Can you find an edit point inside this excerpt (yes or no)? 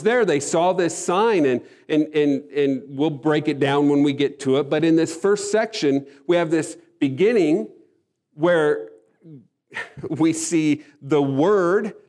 no